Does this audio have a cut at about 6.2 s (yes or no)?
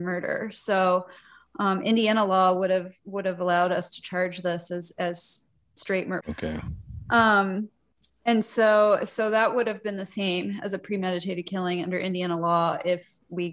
yes